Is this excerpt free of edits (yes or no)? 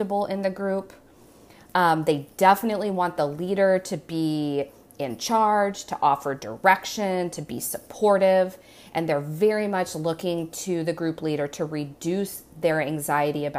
yes